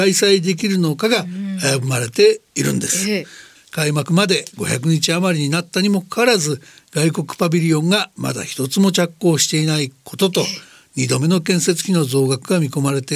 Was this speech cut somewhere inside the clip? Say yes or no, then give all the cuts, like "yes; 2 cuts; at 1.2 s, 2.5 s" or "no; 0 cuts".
yes; 1 cut; at 3.5 s